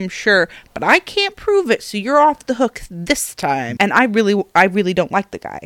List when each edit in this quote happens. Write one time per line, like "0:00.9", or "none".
0:03.8